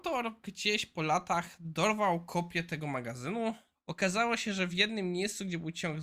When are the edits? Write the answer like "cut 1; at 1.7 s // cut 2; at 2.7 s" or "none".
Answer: cut 1; at 3.7 s